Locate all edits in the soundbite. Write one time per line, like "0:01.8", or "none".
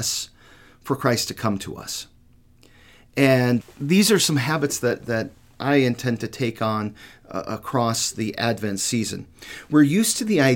0:03.6